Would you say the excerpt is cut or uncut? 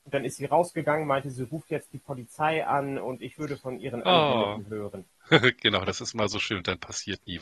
uncut